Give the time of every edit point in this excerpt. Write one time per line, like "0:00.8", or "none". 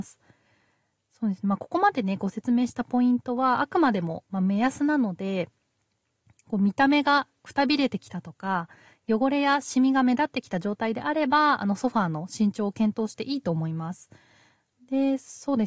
0:14.7